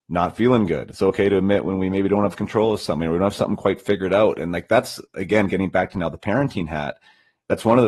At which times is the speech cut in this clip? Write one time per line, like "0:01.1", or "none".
none

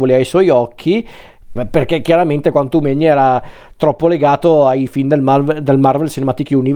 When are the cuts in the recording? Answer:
0:01.6

